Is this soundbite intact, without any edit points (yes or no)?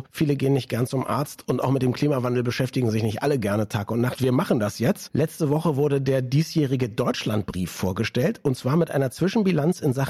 yes